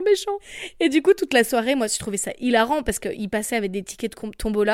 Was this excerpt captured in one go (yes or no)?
yes